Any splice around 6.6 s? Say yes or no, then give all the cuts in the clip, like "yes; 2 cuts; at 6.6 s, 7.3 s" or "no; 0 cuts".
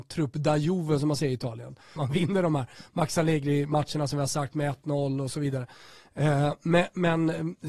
no; 1 cut; at 2.0 s